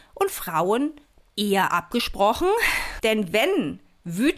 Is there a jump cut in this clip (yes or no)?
yes